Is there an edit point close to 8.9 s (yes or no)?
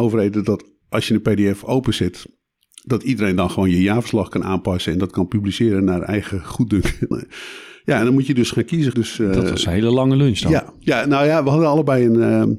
yes